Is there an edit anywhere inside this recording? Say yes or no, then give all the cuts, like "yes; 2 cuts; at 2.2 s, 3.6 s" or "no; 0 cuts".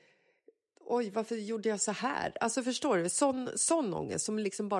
no; 0 cuts